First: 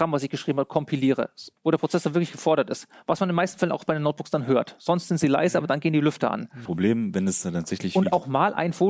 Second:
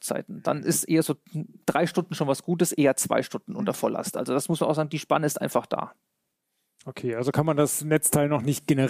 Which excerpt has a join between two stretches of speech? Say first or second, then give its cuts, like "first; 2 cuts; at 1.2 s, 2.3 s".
first; 2 cuts; at 1.6 s, 6.7 s